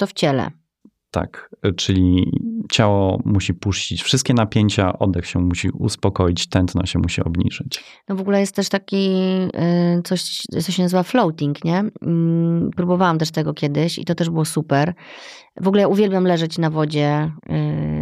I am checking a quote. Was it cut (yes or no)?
no